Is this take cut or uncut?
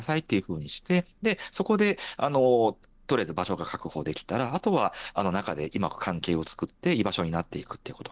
uncut